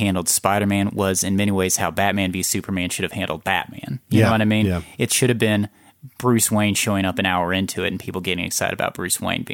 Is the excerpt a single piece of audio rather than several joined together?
yes; 0 cuts

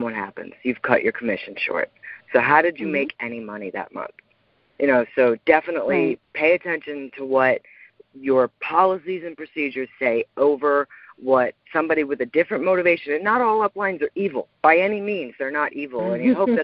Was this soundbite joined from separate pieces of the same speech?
no; 0 cuts

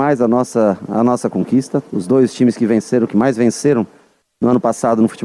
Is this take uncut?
yes; 0 cuts

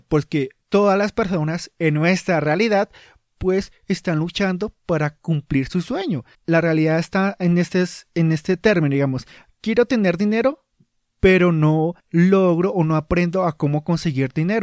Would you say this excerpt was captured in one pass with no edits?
no; 2 cuts; at 6.3 s, 12.0 s

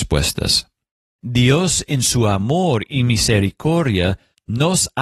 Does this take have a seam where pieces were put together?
yes; 1 cut; at 1.2 s

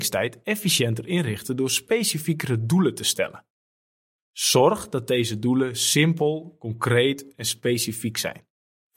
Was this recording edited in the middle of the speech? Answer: no; 0 cuts

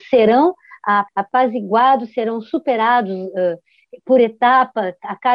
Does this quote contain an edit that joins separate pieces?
yes; 1 cut; at 1.1 s

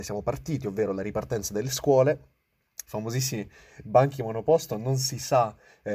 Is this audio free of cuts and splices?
no; 1 cut; at 2.8 s

